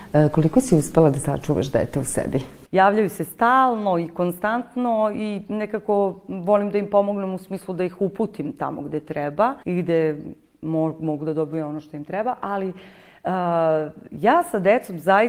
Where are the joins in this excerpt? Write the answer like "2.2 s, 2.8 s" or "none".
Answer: 2.6 s, 9.6 s